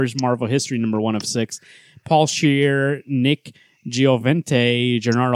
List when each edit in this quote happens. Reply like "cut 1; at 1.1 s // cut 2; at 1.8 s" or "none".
none